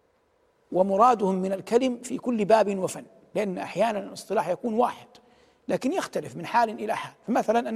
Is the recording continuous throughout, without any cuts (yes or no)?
yes